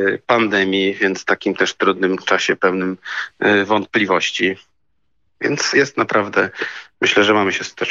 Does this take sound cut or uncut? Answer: cut